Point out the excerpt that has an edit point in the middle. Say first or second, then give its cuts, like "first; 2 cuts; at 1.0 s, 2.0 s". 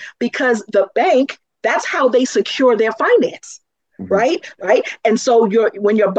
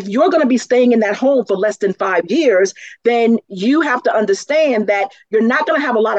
first; 1 cut; at 4.5 s